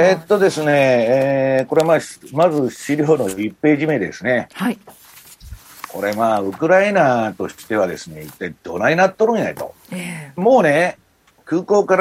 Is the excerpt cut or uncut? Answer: uncut